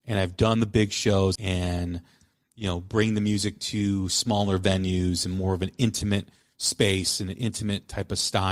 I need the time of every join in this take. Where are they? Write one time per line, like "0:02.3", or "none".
0:01.4